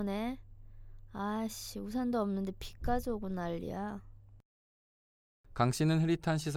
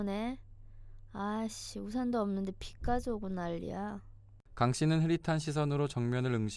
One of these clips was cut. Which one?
second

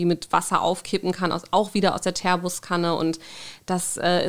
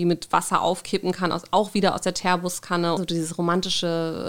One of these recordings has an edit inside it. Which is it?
second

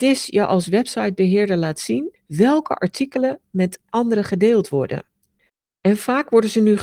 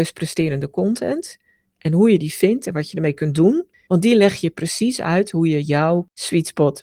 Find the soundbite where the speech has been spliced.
second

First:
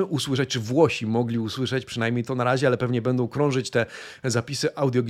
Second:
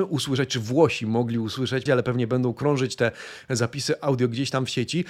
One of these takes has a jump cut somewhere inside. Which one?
second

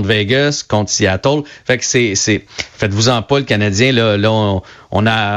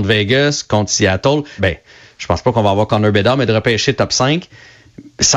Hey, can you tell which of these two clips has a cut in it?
second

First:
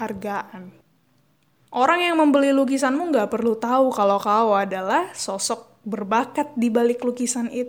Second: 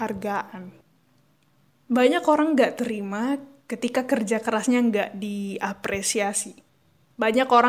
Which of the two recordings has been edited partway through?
first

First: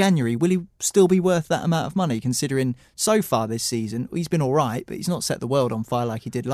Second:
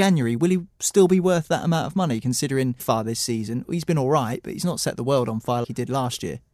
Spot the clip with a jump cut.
second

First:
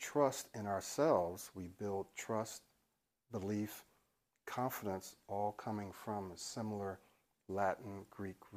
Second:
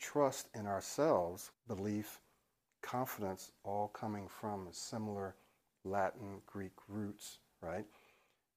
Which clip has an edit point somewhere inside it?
second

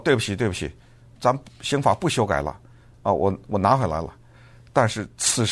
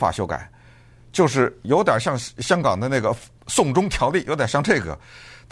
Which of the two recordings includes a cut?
first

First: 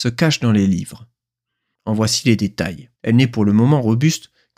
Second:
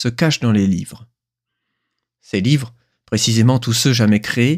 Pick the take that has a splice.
first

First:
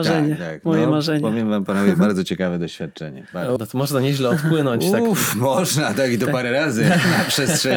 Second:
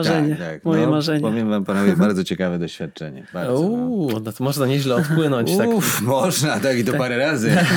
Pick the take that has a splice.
first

